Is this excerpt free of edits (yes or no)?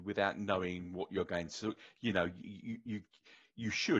yes